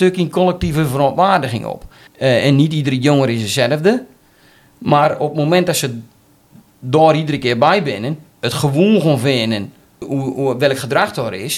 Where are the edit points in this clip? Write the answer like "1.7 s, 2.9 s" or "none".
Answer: 2.1 s, 10.0 s